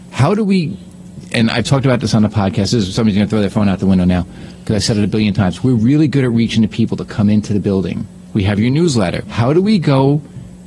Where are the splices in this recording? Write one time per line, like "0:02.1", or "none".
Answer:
0:09.2